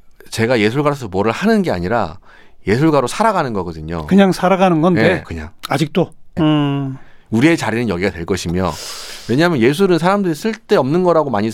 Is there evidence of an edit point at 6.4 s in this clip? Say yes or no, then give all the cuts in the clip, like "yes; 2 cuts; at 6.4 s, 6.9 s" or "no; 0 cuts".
yes; 2 cuts; at 5.2 s, 6.4 s